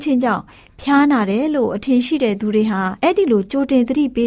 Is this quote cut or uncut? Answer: cut